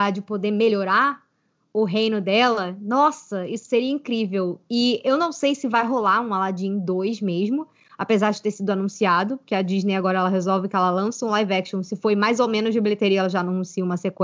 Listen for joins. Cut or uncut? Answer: uncut